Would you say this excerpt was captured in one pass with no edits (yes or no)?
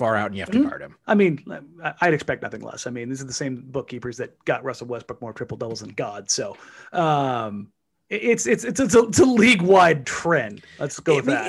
no